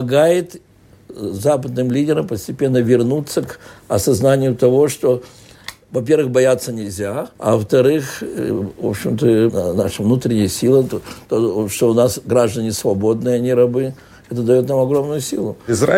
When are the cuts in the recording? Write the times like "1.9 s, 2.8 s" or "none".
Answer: 7.3 s, 9.5 s